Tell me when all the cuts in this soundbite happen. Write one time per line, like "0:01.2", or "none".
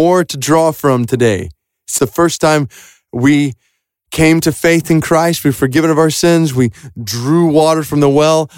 0:02.0